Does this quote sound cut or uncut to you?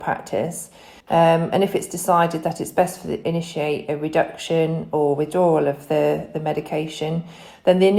cut